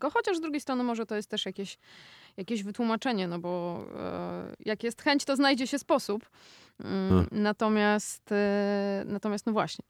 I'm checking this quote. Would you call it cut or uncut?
uncut